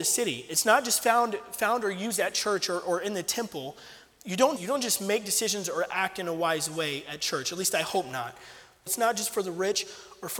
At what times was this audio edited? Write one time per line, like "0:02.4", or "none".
0:04.6
0:08.9

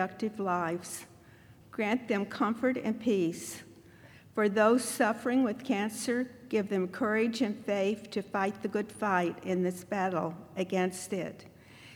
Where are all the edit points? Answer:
0:01.6

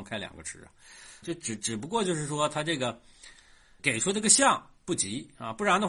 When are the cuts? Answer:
0:01.2
0:03.8

